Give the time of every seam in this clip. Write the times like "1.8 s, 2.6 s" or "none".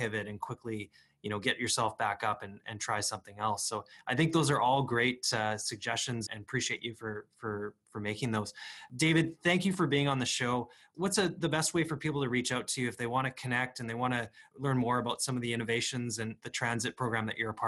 6.3 s